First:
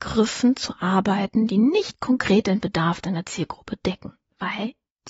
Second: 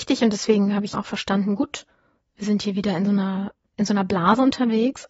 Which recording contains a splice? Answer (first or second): second